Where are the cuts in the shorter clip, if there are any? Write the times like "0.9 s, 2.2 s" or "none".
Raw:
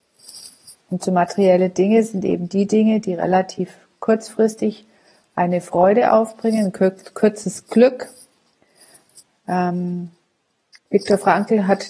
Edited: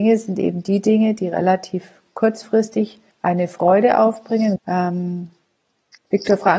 3.1 s, 4.6 s